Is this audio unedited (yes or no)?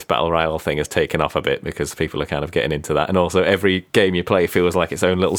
yes